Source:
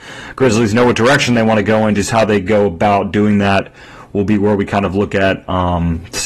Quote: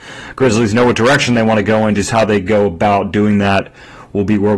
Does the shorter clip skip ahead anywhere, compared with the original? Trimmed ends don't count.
no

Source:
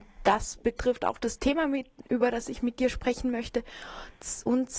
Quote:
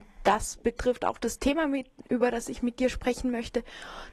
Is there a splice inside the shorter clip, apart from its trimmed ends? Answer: no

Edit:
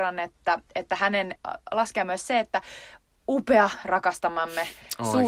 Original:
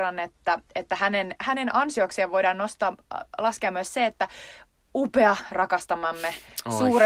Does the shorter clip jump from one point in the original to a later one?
yes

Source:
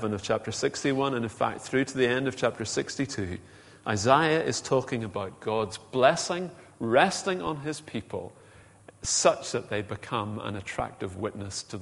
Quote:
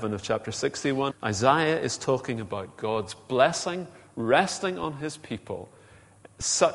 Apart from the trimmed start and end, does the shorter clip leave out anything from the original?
yes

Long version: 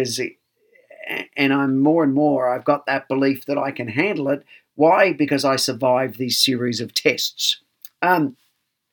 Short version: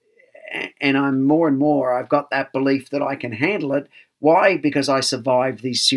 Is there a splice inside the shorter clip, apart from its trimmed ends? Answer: no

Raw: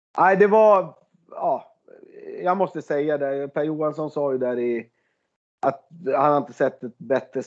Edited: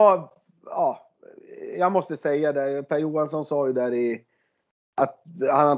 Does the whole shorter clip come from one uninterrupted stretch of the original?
yes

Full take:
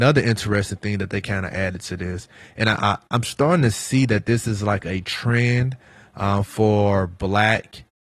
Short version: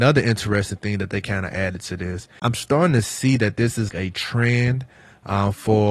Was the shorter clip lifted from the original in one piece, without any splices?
no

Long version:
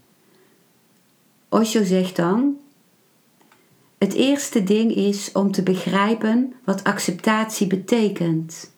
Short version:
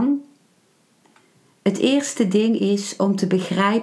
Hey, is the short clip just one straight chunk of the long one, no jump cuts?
yes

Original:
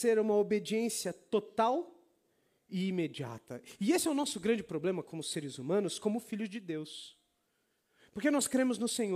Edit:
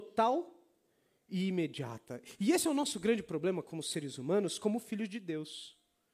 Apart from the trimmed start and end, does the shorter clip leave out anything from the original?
no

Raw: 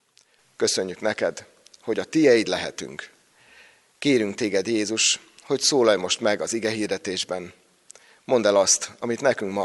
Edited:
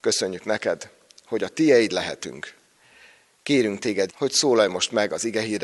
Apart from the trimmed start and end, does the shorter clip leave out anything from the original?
yes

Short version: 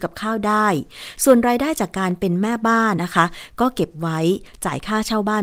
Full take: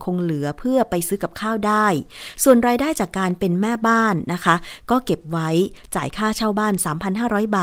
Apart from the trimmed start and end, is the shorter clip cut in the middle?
yes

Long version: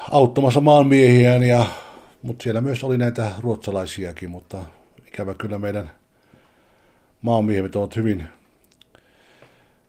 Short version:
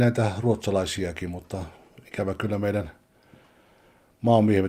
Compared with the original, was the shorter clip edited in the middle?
no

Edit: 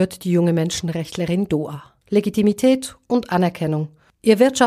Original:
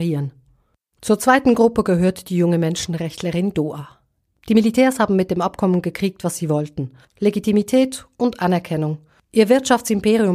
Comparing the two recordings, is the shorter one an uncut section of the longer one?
no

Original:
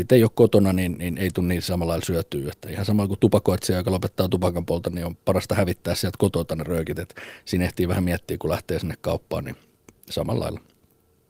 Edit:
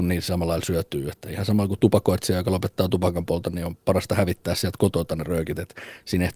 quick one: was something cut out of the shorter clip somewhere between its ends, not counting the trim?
no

